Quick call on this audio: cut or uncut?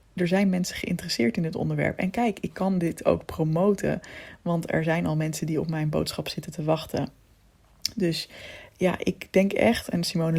uncut